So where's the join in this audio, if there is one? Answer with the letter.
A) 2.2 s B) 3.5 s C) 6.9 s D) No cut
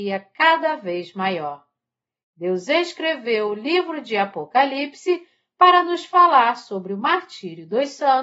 A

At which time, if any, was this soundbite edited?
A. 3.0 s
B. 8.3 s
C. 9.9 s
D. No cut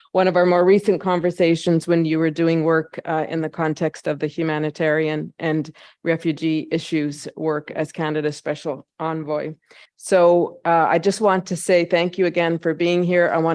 C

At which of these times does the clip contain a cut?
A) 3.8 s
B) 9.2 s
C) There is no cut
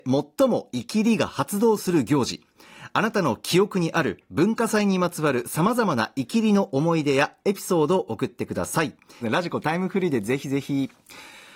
B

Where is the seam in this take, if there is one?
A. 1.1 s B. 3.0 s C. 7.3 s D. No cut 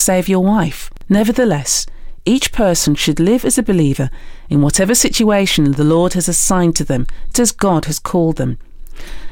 C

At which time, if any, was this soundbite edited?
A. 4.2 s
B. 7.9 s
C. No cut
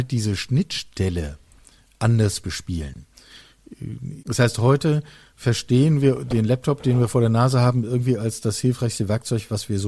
A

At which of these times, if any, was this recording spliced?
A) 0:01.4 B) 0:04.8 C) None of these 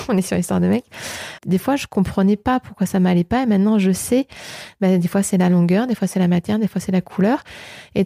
A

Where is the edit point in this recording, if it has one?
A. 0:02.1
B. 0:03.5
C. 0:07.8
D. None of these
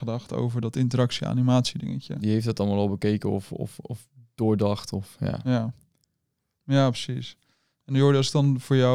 D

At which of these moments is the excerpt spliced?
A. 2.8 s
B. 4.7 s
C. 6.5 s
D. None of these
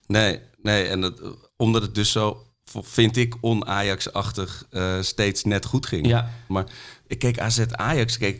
C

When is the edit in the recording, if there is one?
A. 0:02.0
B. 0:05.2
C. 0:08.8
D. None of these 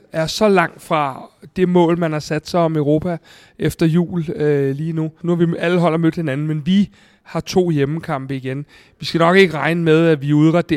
B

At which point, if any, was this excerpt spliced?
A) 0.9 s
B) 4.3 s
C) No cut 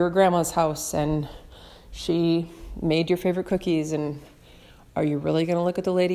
C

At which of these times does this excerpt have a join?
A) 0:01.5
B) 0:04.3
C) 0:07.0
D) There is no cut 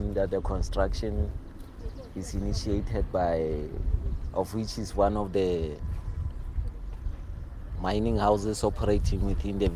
B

